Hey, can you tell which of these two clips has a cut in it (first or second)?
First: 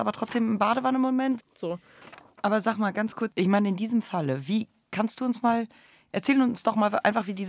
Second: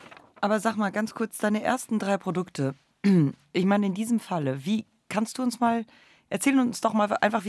first